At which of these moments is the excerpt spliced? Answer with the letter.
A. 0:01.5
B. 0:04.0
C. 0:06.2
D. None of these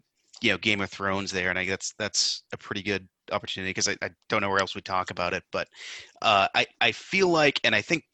D